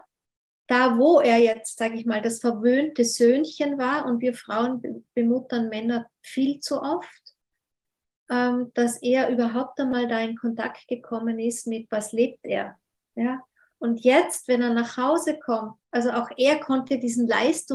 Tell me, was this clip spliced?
yes; 2 cuts; at 13.7 s, 15.8 s

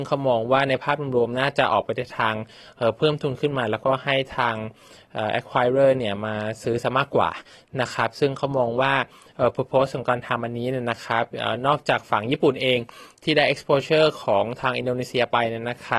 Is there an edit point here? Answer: no; 0 cuts

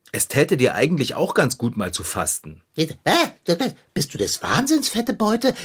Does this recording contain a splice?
no; 0 cuts

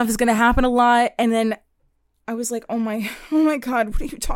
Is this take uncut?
yes; 0 cuts

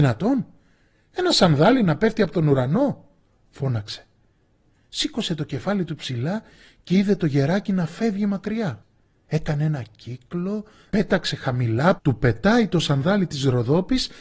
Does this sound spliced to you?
yes; 3 cuts; at 9.2 s, 10.9 s, 12.0 s

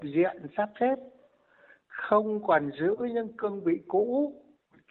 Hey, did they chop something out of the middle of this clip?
no; 0 cuts

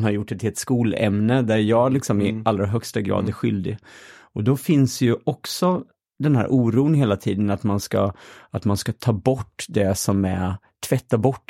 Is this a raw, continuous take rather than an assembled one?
yes; 0 cuts

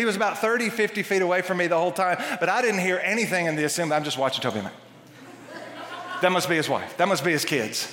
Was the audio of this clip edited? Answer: no; 0 cuts

